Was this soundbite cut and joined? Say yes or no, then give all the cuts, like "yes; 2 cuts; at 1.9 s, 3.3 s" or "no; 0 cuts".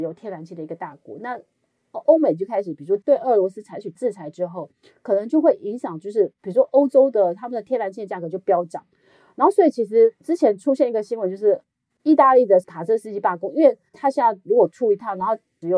no; 0 cuts